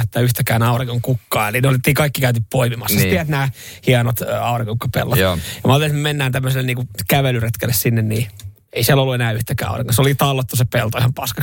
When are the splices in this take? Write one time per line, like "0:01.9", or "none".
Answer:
none